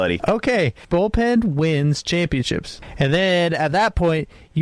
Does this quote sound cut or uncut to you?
uncut